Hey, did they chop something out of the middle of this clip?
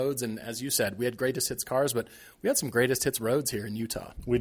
no; 0 cuts

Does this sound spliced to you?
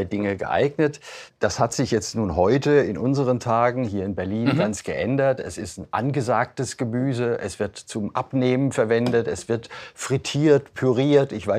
no; 0 cuts

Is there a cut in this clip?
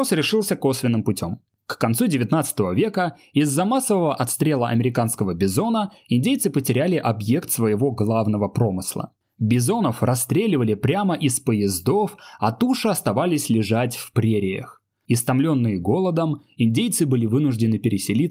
no; 0 cuts

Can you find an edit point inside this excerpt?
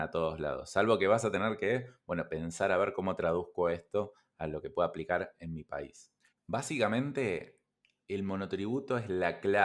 yes; 1 cut; at 6.3 s

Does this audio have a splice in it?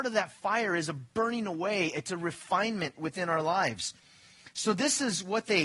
no; 0 cuts

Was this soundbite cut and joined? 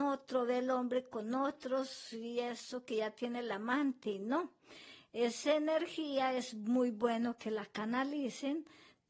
no; 0 cuts

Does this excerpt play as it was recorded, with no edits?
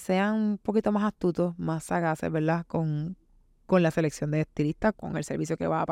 no; 1 cut; at 4.9 s

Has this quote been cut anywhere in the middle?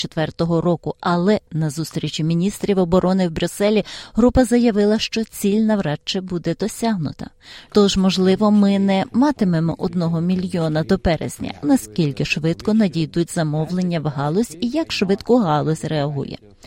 yes; 2 cuts; at 7.7 s, 11.6 s

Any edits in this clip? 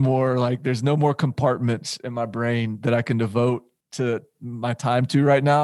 no; 0 cuts

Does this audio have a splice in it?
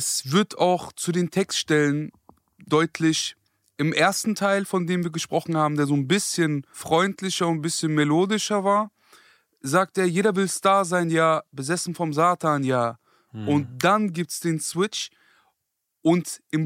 no; 0 cuts

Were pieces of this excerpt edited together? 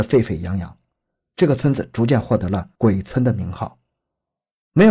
no; 0 cuts

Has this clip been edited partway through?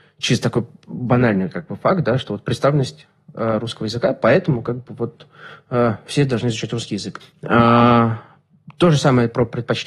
yes; 1 cut; at 7.2 s

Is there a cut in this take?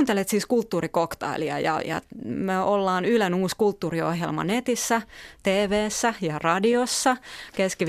no; 0 cuts

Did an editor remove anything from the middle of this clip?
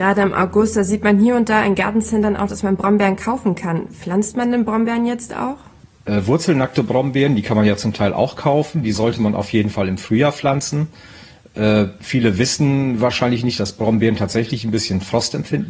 no; 0 cuts

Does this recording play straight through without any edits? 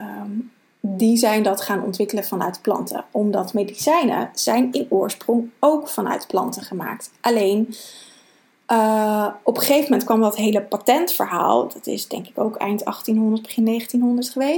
yes; 0 cuts

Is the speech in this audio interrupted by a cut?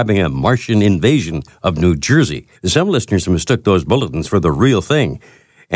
yes; 1 cut; at 2.5 s

